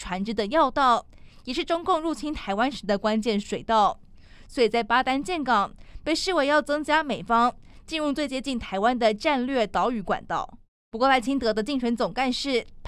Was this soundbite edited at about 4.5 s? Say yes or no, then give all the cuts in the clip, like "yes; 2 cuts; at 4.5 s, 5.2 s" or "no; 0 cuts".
no; 1 cut; at 10.9 s